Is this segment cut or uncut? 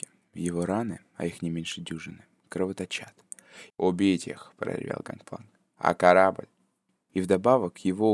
cut